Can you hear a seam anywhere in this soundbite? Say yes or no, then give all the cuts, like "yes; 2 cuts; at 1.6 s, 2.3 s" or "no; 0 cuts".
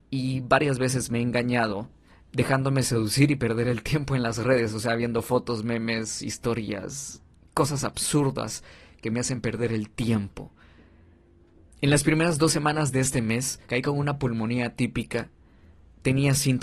yes; 2 cuts; at 11.7 s, 13.6 s